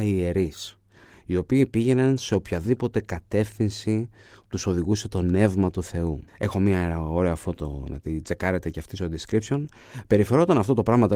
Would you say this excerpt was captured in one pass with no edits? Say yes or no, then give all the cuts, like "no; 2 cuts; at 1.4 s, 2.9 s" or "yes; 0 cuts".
no; 1 cut; at 6.3 s